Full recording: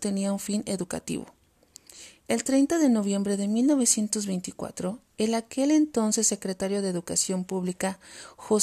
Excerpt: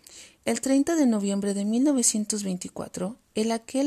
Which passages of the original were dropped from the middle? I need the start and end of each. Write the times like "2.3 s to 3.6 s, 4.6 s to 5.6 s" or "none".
none